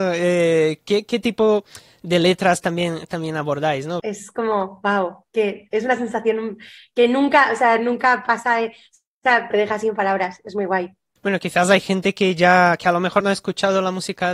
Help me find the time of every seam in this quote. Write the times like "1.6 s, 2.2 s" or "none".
4.0 s, 9.5 s, 13.2 s